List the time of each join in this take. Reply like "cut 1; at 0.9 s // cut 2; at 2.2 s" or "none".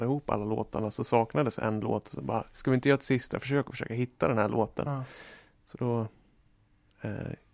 none